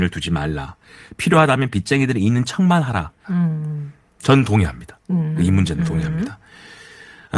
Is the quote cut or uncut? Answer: cut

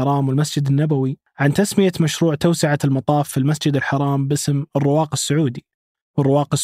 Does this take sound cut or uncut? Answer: uncut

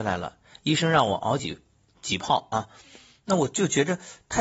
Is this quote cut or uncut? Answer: uncut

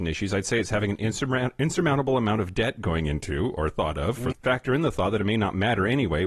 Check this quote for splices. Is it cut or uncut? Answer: cut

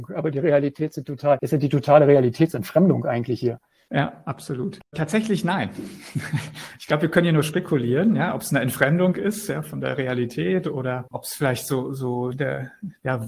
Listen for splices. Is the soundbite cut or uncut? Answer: uncut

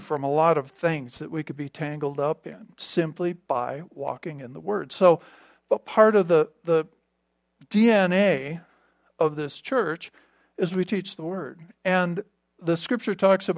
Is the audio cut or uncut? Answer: uncut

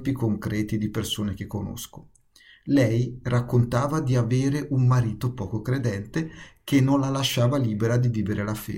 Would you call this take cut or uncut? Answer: uncut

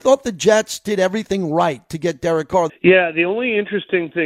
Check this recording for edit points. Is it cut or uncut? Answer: cut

